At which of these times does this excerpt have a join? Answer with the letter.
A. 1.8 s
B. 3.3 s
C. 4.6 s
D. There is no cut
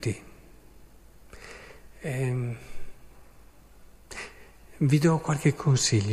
A